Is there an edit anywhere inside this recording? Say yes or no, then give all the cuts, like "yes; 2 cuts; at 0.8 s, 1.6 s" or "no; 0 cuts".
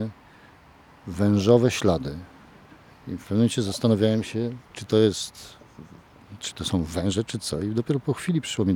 no; 0 cuts